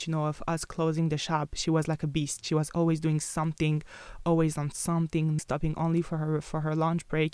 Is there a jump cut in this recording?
yes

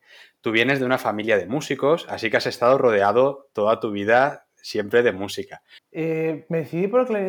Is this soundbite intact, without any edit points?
no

